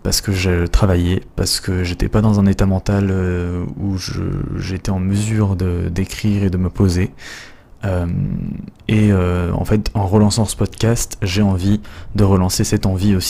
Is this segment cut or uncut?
cut